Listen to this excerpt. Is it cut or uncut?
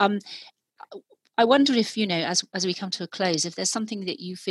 uncut